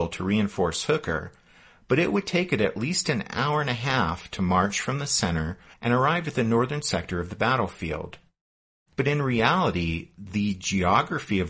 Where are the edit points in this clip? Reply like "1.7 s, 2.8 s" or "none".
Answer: 5.7 s, 8.9 s